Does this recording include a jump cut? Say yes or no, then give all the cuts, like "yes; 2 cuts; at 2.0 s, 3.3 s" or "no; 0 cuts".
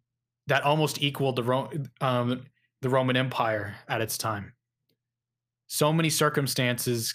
no; 0 cuts